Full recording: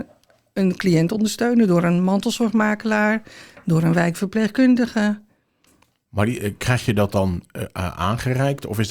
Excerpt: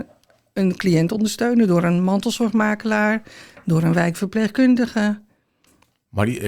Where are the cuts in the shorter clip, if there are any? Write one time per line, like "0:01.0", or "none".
none